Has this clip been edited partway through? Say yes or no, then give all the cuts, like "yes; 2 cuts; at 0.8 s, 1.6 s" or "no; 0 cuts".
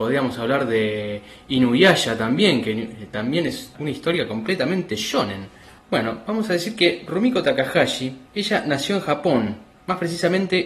yes; 2 cuts; at 5.8 s, 8.3 s